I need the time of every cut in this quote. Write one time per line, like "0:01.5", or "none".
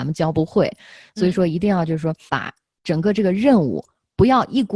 0:02.3

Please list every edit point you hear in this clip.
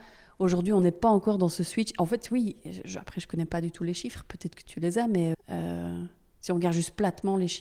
0:05.3

